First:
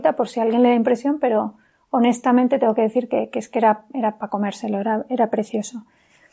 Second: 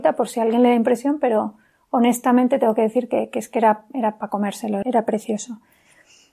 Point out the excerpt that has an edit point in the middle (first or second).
second